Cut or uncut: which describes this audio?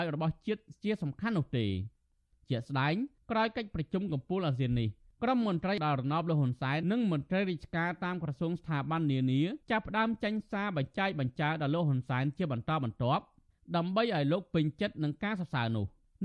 cut